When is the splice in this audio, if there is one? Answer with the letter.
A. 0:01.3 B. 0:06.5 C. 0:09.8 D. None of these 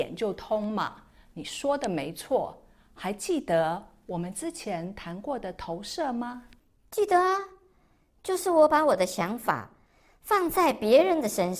D